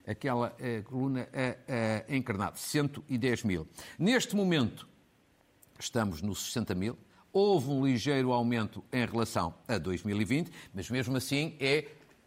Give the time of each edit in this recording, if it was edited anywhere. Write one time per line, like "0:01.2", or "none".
none